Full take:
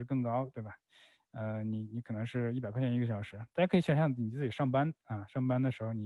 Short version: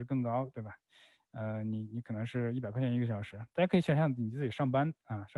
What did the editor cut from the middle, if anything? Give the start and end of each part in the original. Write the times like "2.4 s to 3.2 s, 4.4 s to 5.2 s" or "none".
none